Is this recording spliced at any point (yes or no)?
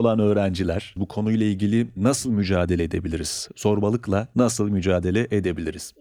yes